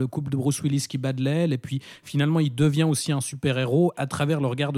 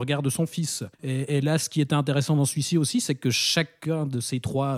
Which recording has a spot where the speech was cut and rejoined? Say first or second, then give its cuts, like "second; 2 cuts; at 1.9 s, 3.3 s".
second; 1 cut; at 0.9 s